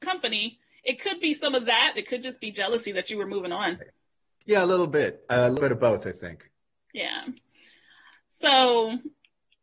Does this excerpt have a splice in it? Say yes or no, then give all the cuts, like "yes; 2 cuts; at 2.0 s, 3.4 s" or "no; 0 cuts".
yes; 1 cut; at 2.0 s